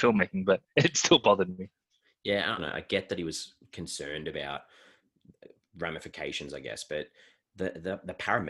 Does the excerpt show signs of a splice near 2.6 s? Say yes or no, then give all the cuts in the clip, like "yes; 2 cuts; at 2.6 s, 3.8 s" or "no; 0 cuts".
yes; 1 cut; at 2.6 s